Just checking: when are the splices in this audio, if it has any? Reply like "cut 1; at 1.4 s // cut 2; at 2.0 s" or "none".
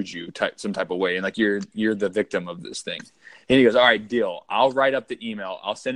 none

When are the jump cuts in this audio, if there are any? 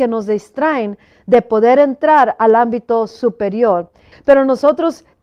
cut 1; at 4.1 s

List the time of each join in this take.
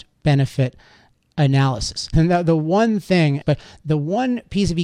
cut 1; at 2.1 s // cut 2; at 3.4 s

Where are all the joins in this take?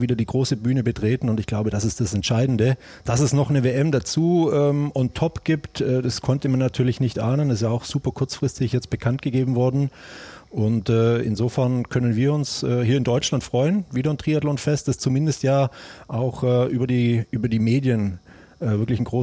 none

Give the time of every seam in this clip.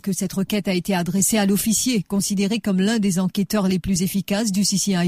none

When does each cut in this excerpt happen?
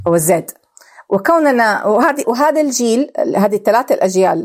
cut 1; at 2.2 s

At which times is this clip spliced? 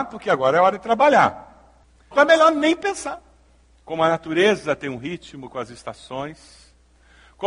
cut 1; at 2.1 s // cut 2; at 3.7 s

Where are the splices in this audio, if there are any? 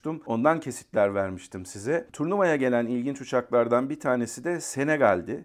cut 1; at 2.1 s

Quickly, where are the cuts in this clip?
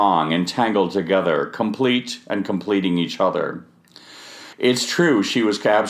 cut 1; at 4.5 s

